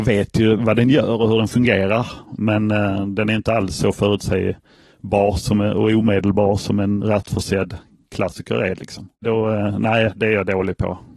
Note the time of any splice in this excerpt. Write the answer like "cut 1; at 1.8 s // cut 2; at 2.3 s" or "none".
cut 1; at 7.0 s // cut 2; at 9.2 s